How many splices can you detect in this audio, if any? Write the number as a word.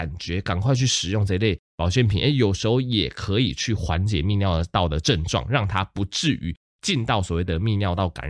zero